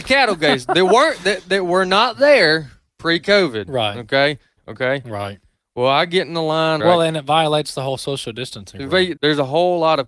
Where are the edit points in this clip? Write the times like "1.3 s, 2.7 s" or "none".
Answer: 4.6 s, 6.8 s, 9.2 s